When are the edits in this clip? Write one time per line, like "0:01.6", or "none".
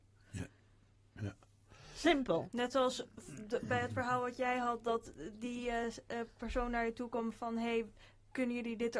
none

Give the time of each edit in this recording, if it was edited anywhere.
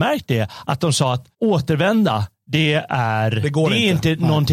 0:01.3

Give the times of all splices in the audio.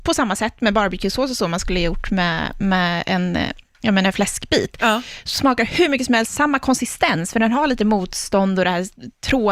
none

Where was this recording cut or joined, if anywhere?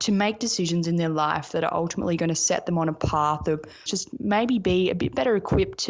0:03.9

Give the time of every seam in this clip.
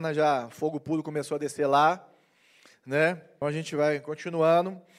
0:03.4

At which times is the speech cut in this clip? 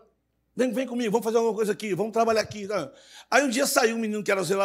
none

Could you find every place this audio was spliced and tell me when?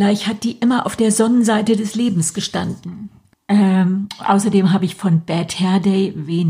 0:03.3

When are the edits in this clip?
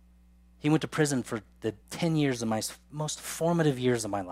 0:01.8

